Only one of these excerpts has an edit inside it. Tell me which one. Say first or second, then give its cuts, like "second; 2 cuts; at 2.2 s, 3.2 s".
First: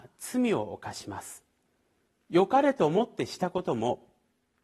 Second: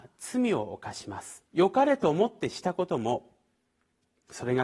second; 1 cut; at 1.5 s